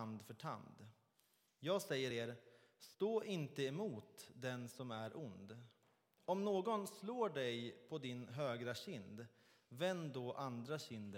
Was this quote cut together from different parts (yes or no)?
no